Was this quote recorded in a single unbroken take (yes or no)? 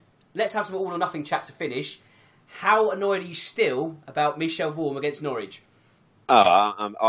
yes